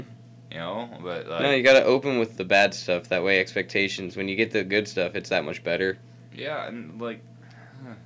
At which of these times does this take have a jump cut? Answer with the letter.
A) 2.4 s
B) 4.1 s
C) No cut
A